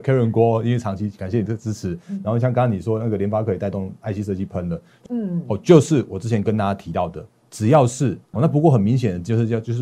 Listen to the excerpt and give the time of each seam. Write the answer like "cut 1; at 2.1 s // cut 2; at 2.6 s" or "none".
cut 1; at 1.5 s // cut 2; at 5.1 s // cut 3; at 8.3 s